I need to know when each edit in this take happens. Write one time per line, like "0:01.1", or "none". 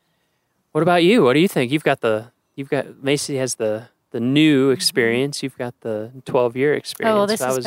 none